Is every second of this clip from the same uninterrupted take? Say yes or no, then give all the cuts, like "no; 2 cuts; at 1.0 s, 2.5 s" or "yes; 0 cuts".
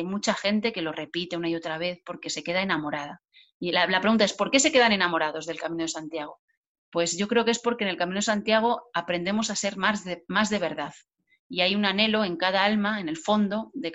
yes; 0 cuts